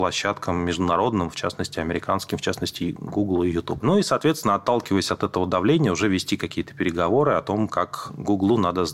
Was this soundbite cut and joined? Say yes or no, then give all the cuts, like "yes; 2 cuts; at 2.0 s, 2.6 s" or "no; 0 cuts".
yes; 1 cut; at 3.8 s